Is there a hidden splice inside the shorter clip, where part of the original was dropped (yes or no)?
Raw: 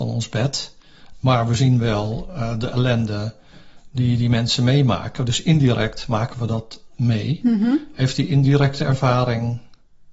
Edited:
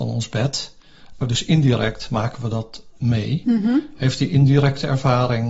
yes